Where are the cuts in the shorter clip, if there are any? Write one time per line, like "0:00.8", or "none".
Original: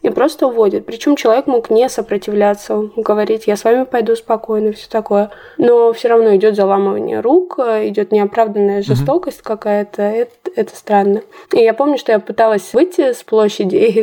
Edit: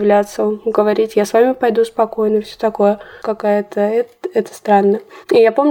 0:03.2